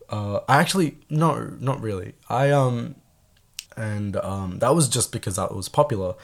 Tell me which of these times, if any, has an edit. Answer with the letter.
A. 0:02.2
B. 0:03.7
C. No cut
B